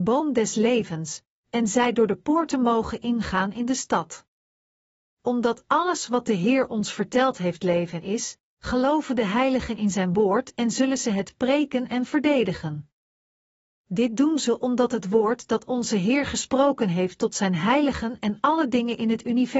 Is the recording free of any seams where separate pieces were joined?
yes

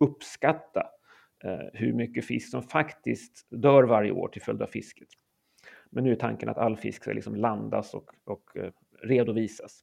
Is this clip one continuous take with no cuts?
yes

